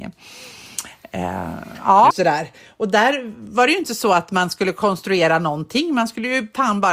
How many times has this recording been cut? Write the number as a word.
one